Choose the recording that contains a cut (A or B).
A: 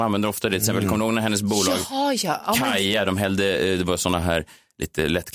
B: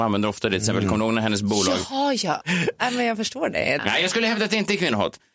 B